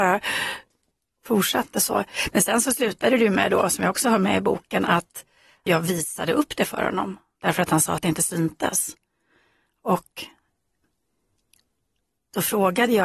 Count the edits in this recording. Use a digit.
0